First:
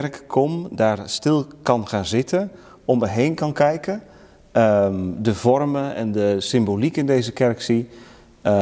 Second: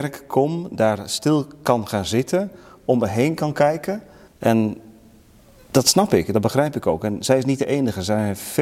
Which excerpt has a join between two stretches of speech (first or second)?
second